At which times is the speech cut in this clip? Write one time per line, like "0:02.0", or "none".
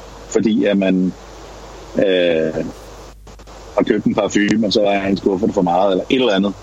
none